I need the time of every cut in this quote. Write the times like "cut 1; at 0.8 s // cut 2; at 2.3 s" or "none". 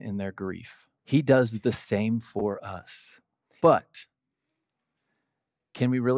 cut 1; at 1.0 s // cut 2; at 3.6 s